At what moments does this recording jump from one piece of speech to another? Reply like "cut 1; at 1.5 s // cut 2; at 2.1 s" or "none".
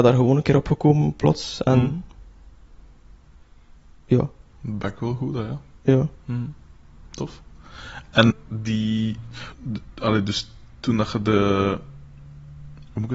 cut 1; at 8.3 s // cut 2; at 9.5 s